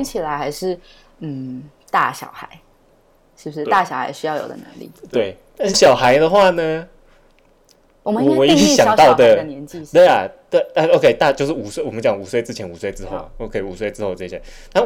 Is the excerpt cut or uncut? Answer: cut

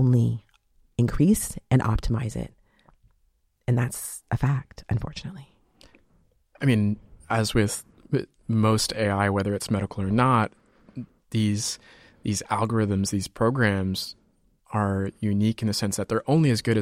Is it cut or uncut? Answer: uncut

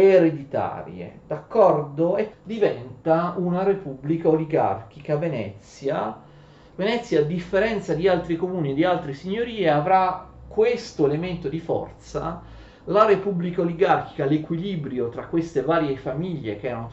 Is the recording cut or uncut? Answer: cut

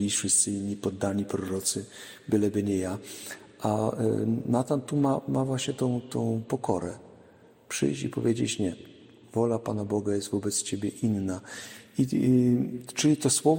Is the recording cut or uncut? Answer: uncut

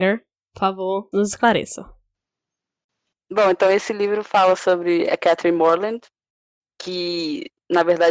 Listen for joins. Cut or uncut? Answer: cut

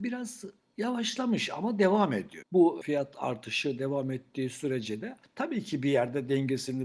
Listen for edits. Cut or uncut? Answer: cut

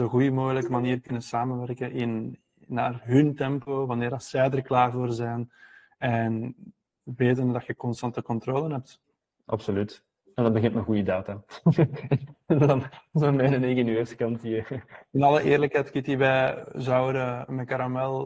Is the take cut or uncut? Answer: uncut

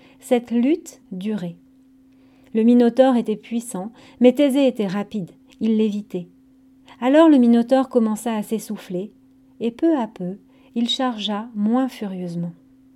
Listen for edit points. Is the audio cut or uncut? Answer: cut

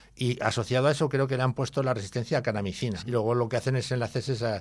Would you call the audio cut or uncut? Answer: cut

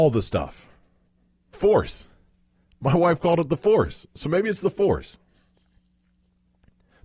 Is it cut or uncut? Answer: cut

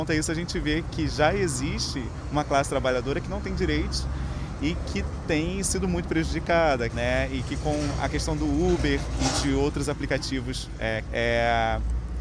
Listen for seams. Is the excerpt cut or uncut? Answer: cut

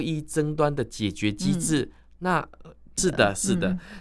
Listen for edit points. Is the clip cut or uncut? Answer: cut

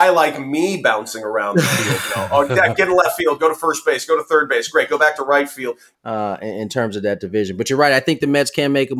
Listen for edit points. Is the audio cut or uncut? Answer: cut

